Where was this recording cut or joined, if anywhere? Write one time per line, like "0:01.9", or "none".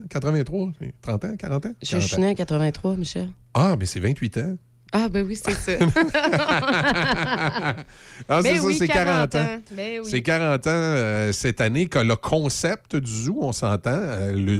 none